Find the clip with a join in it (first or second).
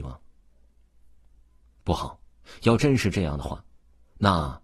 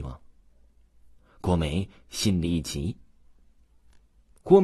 second